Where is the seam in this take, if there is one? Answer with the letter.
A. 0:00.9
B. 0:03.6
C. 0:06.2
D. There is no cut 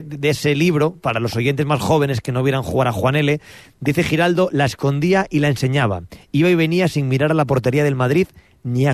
D